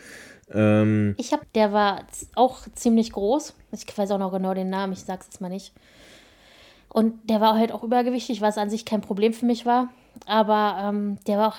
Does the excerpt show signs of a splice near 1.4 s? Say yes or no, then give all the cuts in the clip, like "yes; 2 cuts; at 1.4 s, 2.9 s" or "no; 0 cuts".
yes; 1 cut; at 1.4 s